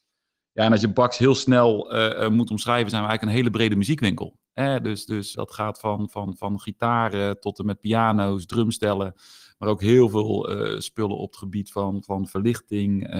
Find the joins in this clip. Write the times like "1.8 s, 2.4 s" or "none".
5.4 s